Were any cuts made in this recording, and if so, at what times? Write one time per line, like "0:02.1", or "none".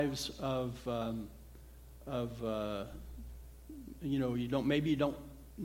0:04.0